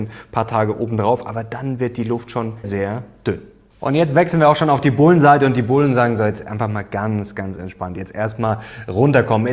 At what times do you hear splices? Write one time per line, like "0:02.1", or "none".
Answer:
0:02.6